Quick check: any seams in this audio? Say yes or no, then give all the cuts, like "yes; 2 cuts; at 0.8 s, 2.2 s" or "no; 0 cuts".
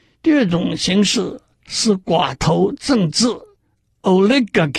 no; 0 cuts